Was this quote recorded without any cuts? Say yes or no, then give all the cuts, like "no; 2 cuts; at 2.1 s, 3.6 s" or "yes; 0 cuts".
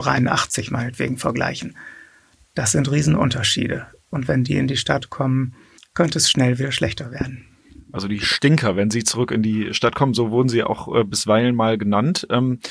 yes; 0 cuts